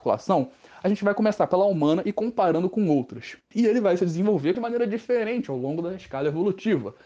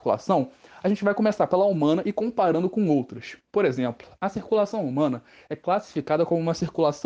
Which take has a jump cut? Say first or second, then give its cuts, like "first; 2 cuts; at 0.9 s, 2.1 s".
first; 2 cuts; at 3.5 s, 4.5 s